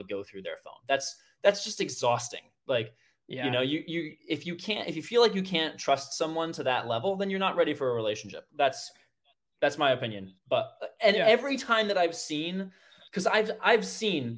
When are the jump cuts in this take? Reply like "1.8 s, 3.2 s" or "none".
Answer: none